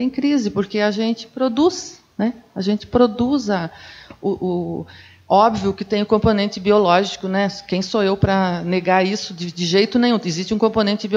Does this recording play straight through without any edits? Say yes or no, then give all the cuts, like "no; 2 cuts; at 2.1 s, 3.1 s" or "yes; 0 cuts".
yes; 0 cuts